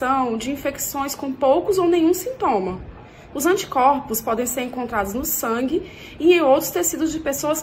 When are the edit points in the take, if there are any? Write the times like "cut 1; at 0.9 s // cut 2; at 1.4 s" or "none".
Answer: cut 1; at 3.3 s